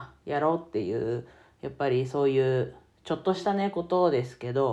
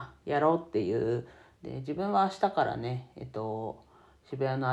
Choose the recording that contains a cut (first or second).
second